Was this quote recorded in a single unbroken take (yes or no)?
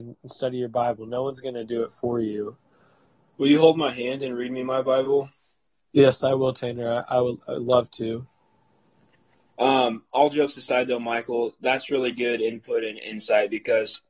yes